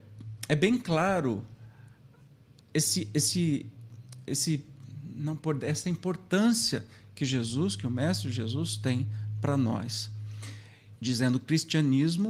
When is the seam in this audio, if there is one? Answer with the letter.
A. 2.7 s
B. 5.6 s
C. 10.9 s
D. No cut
C